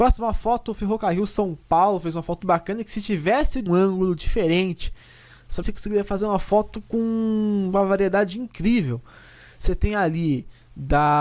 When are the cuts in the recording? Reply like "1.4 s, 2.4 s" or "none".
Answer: 2.4 s, 3.7 s, 5.6 s